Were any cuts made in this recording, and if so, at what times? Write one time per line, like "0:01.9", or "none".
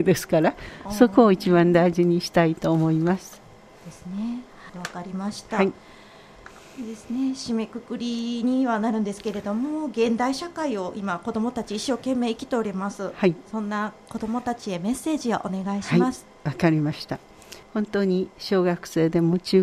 0:04.7
0:17.6